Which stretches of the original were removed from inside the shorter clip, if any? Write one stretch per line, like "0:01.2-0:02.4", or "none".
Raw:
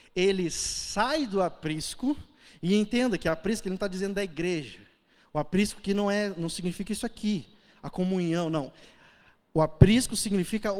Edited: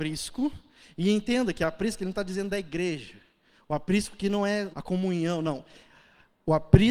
0:06.3-0:07.8